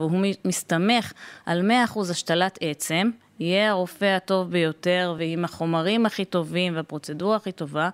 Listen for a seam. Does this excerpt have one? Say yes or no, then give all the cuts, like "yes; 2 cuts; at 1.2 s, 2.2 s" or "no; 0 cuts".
no; 0 cuts